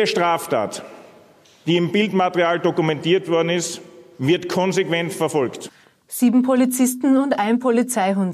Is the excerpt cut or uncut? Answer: uncut